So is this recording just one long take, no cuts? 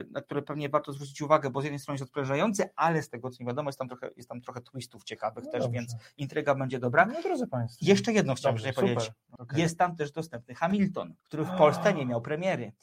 no; 2 cuts; at 9.4 s, 11.2 s

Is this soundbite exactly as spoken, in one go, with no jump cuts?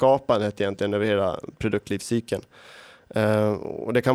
yes; 0 cuts

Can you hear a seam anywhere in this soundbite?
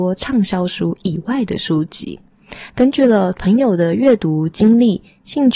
yes; 1 cut; at 2.7 s

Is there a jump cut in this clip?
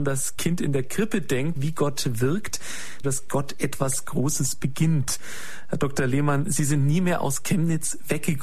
yes; 2 cuts; at 1.6 s, 3.0 s

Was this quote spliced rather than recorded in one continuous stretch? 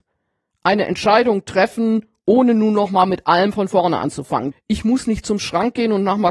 yes; 1 cut; at 4.5 s

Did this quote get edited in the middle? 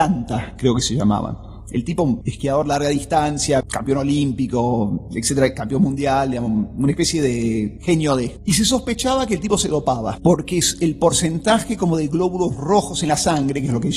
no; 0 cuts

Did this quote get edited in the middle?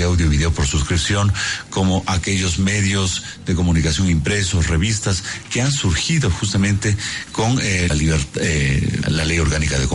yes; 2 cuts; at 7.9 s, 9.0 s

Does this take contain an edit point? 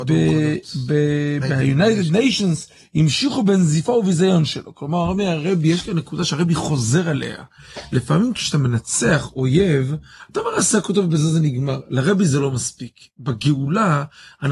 no; 0 cuts

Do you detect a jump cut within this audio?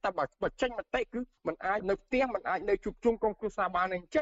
no; 0 cuts

